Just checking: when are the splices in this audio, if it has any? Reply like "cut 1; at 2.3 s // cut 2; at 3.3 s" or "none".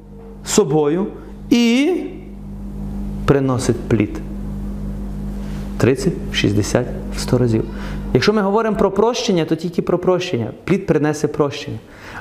none